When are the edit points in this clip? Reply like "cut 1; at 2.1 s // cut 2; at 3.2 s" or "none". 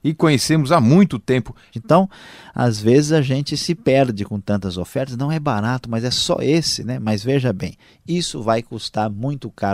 cut 1; at 1.7 s